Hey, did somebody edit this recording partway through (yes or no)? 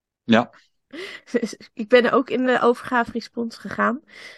no